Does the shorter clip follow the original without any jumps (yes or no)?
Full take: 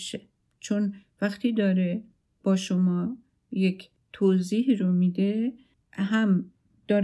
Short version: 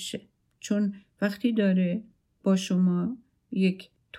yes